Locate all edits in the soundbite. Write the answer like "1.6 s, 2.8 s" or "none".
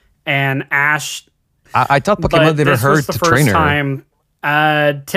1.7 s